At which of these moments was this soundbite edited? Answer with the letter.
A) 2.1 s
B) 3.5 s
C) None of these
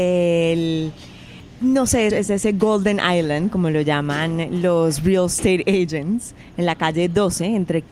A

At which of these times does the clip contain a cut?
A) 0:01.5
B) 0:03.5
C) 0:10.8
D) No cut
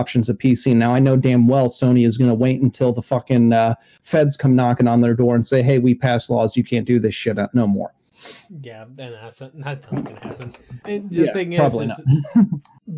C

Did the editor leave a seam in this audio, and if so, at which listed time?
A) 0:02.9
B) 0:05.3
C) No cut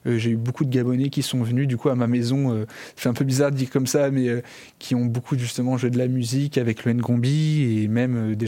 C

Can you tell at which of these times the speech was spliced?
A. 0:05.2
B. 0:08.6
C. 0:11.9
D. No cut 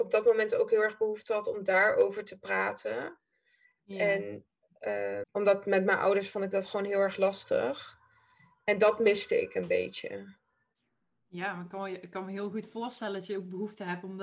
A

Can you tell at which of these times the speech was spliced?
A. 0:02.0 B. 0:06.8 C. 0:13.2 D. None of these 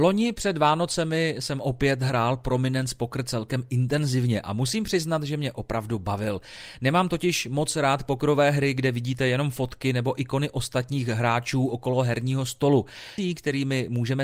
C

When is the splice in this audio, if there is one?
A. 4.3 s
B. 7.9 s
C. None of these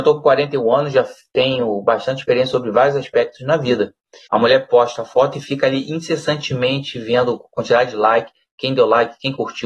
A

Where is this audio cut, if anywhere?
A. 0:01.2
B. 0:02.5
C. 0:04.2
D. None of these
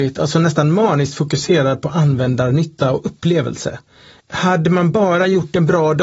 C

